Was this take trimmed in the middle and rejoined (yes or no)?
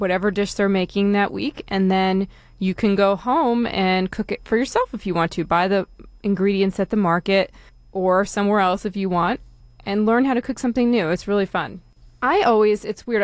no